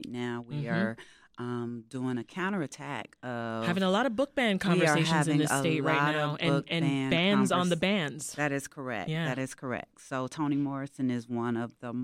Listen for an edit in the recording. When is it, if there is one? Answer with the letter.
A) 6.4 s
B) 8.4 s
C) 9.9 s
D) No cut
D